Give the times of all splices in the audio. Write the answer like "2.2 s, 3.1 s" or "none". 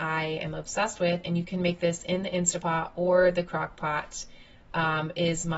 none